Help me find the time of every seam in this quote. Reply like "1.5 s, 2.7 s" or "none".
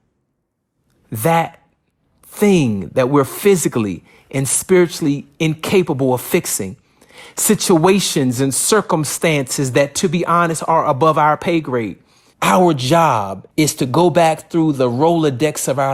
12.3 s, 13.5 s